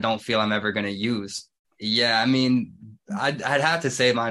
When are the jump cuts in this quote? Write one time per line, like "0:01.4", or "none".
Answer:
0:01.6